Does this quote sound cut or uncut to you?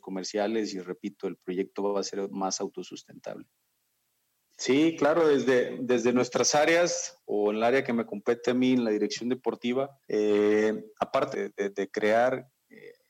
cut